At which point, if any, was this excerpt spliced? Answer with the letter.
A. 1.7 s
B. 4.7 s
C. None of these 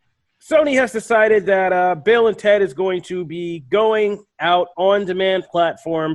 B